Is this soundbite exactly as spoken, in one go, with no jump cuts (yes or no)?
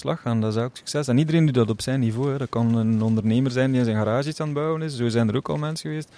yes